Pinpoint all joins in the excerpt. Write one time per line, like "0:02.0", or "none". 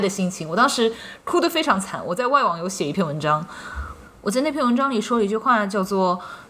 none

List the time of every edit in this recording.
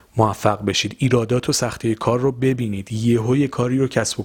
none

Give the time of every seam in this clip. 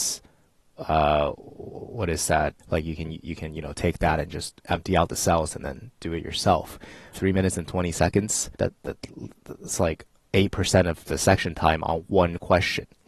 0:02.6
0:07.1
0:08.6

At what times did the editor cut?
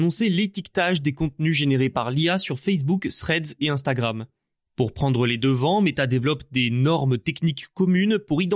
none

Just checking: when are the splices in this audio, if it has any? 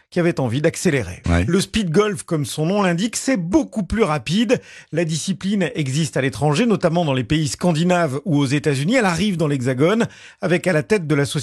0:01.2

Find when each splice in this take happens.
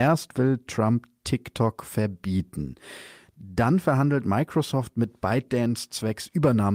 none

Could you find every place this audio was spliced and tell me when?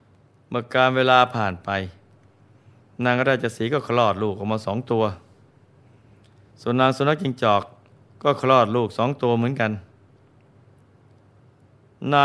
none

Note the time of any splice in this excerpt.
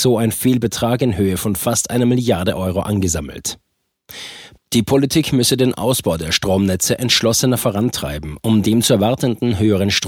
0:04.6

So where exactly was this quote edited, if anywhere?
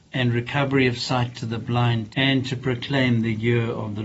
0:02.1

